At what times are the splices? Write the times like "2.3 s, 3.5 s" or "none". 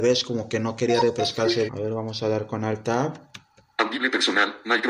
1.7 s